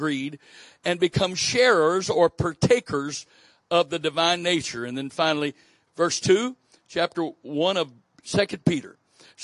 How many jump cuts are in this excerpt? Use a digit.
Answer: 1